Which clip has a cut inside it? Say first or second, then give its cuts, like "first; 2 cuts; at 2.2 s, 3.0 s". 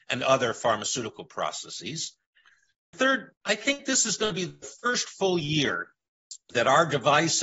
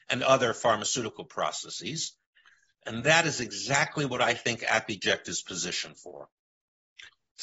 second; 1 cut; at 2.8 s